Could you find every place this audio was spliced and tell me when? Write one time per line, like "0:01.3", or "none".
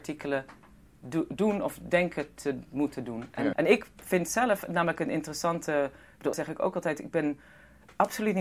0:03.5
0:06.3